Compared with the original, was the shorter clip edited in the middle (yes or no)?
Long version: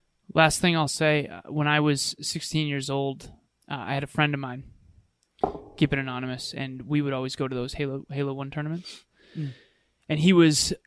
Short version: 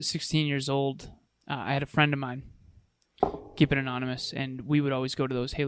no